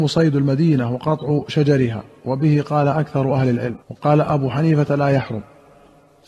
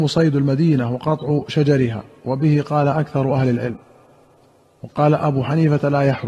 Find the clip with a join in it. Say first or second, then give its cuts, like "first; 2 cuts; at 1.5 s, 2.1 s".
first; 1 cut; at 3.8 s